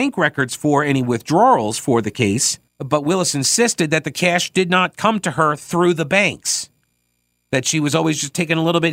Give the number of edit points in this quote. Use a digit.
1